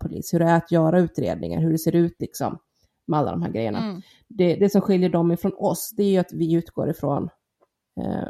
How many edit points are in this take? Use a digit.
0